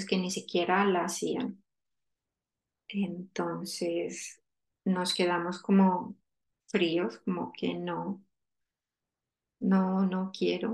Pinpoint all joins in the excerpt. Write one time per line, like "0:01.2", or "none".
0:02.8

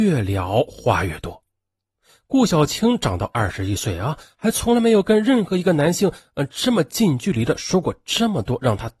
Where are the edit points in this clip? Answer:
none

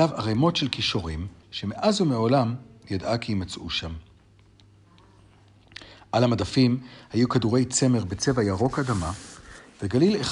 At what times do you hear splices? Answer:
0:01.4

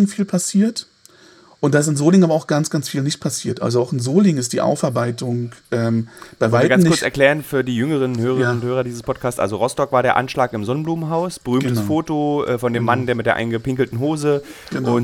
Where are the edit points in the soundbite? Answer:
none

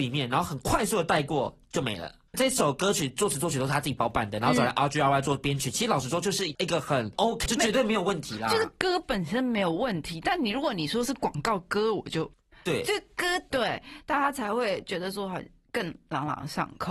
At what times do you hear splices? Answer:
0:07.5
0:13.5

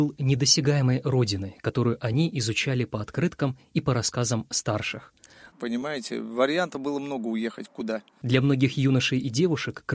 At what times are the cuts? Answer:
0:05.5
0:08.2

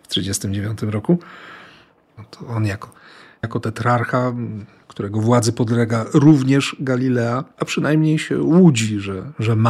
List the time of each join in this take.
0:02.2
0:07.5

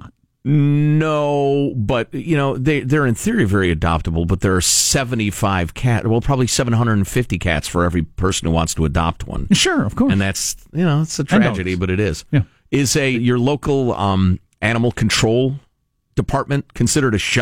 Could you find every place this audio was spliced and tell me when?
0:13.1

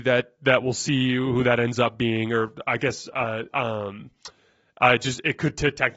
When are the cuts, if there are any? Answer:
none

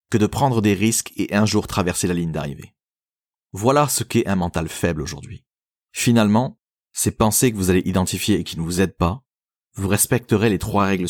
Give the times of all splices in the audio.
0:05.8
0:09.6

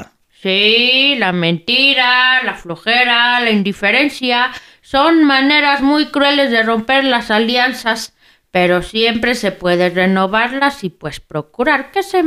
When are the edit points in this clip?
none

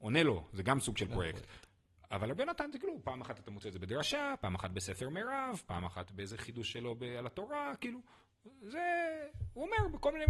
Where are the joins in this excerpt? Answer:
none

